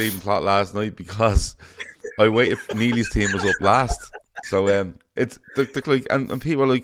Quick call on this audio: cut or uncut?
cut